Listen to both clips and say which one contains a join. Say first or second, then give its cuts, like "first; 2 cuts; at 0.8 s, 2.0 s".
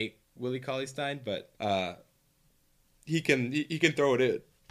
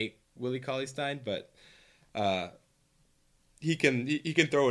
first; 1 cut; at 1.6 s